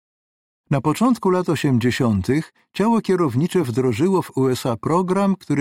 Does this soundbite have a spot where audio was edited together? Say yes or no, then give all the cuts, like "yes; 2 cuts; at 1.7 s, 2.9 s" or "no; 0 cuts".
no; 0 cuts